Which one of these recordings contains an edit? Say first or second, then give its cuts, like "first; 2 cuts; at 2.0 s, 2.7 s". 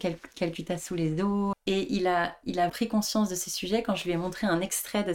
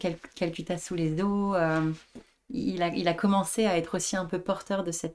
first; 2 cuts; at 1.5 s, 2.7 s